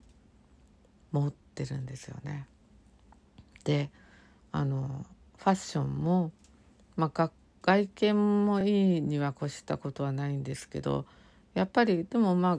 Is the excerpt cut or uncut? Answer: uncut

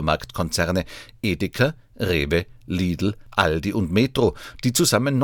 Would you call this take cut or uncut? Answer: uncut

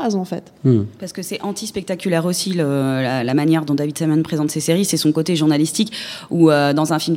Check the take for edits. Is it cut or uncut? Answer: uncut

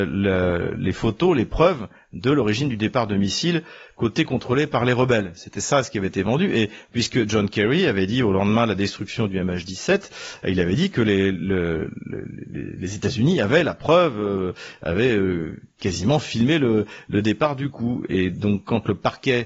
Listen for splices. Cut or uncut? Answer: uncut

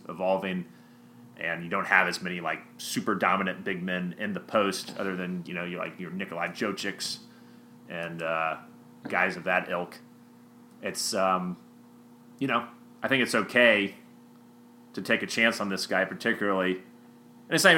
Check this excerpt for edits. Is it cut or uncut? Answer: uncut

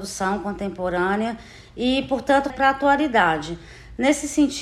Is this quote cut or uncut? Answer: cut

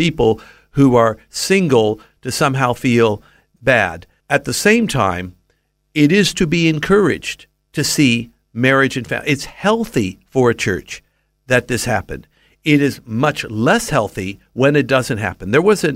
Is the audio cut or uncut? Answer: uncut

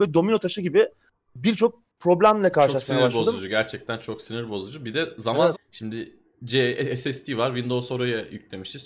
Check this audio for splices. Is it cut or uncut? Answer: cut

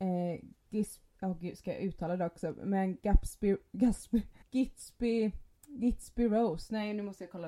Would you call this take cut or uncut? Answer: cut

